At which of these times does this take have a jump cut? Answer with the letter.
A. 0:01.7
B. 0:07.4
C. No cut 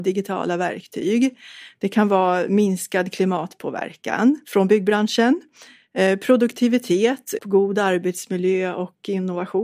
B